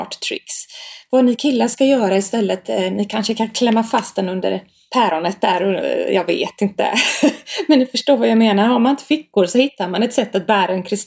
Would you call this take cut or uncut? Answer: uncut